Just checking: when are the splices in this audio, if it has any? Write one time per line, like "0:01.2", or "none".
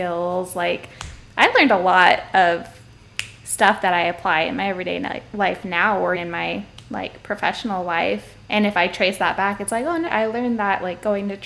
0:06.2
0:10.1